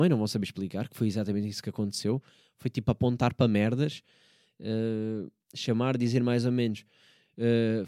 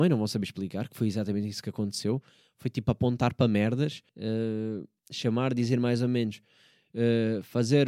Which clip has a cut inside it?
second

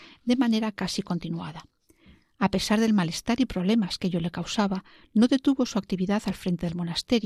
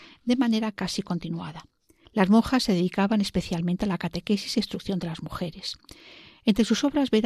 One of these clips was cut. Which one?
second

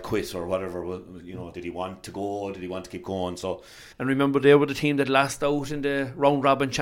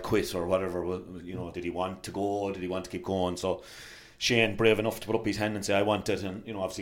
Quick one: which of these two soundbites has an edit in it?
first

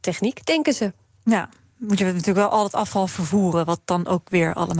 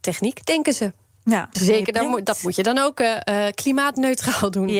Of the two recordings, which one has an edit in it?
second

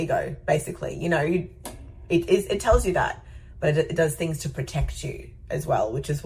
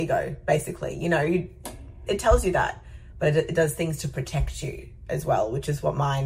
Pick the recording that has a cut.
second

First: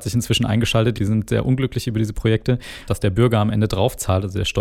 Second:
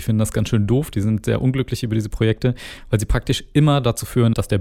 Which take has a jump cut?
first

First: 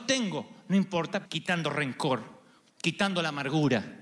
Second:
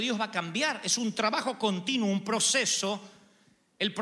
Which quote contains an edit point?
first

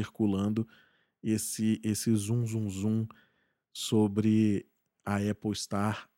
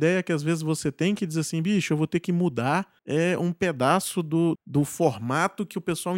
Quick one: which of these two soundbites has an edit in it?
second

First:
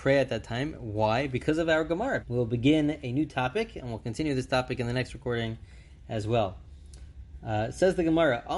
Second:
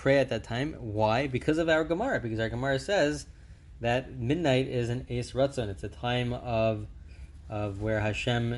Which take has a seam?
first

